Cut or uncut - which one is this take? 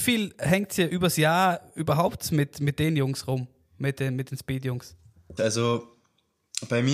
cut